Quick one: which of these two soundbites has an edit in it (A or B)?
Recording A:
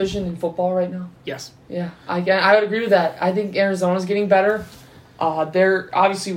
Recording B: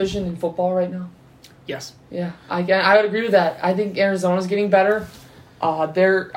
A